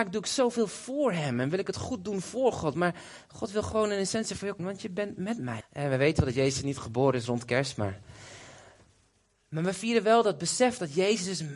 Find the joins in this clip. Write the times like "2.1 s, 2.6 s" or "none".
4.6 s, 5.6 s